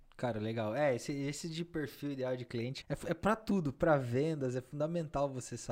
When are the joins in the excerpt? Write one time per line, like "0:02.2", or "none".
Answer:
0:02.8